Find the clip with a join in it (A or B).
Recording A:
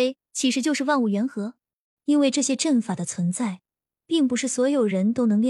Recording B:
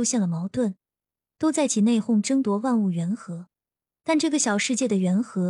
A